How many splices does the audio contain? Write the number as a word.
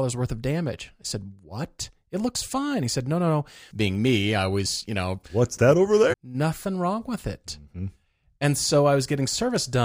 two